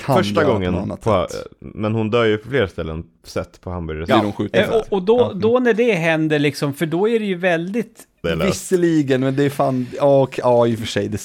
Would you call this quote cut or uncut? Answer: cut